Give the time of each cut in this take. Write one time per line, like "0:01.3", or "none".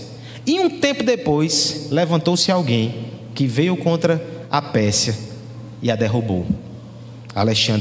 none

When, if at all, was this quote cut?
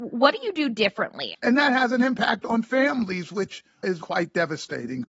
0:01.3
0:04.0

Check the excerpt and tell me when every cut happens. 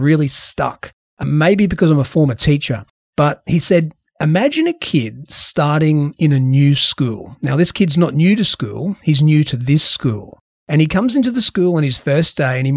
none

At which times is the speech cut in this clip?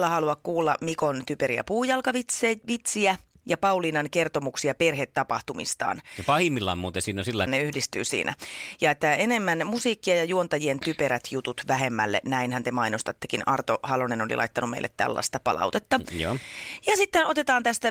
0:07.5

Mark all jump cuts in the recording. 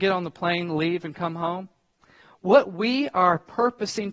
none

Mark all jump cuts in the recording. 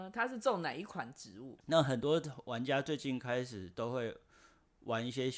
0:01.6

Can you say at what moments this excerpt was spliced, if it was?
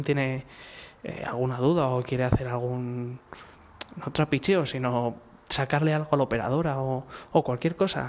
none

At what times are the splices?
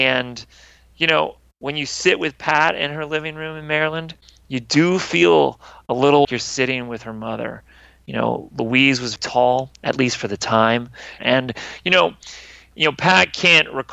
0:06.2
0:09.2
0:11.2

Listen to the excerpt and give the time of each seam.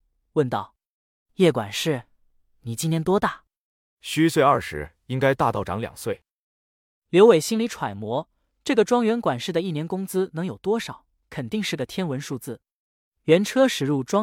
none

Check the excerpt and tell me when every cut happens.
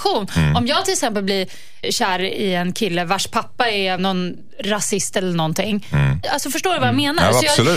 0:01.8
0:04.0
0:06.2

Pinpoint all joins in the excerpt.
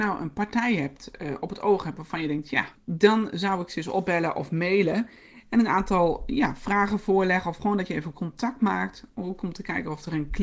0:02.8

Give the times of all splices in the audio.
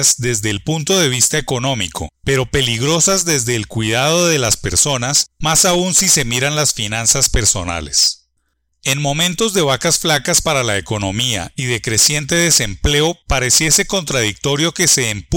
none

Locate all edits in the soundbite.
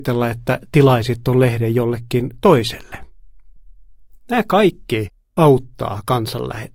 none

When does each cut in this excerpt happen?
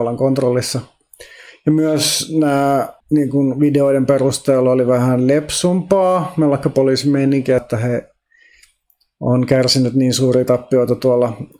0:03.0
0:07.6

